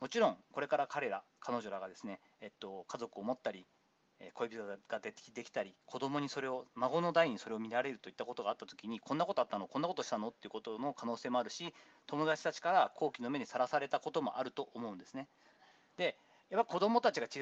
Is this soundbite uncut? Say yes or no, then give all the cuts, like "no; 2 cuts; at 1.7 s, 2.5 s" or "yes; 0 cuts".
yes; 0 cuts